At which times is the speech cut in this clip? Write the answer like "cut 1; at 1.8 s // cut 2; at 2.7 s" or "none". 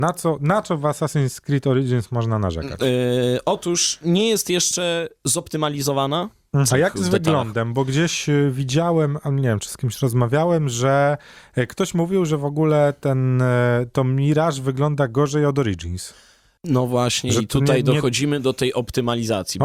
cut 1; at 6.7 s